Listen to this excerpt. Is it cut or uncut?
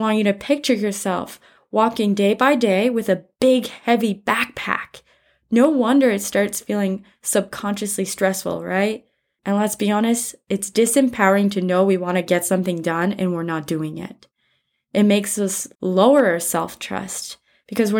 cut